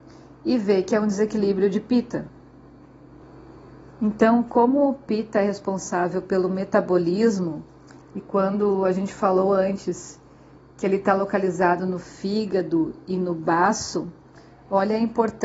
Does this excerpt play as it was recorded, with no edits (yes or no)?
yes